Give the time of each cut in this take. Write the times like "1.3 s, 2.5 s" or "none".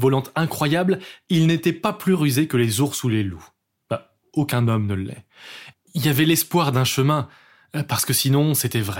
5.7 s